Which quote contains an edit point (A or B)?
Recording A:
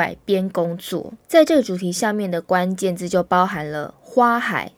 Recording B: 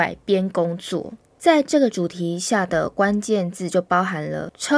B